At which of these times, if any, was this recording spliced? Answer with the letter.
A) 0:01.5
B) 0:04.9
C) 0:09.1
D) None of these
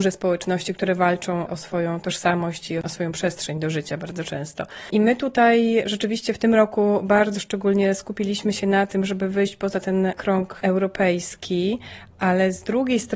A